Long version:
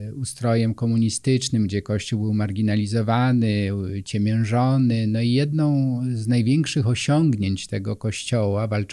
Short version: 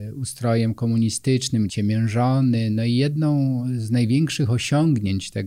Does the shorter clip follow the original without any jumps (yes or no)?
no